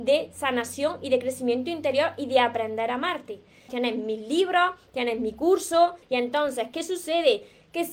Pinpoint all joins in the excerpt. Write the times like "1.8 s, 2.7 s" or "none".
3.7 s, 6.0 s